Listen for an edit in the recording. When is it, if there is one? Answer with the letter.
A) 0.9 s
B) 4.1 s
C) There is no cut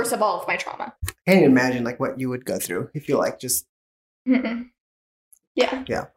A